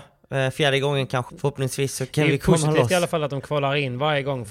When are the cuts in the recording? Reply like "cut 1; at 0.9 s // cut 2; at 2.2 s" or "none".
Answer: cut 1; at 1.3 s